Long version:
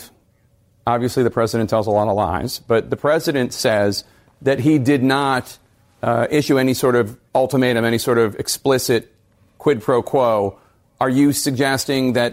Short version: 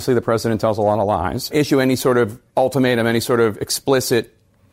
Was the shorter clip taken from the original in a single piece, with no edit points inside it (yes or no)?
no